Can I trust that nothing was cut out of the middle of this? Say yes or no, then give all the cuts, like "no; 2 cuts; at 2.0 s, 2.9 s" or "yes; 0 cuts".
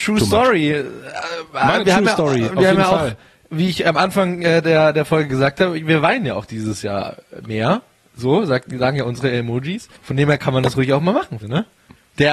no; 2 cuts; at 10.0 s, 11.4 s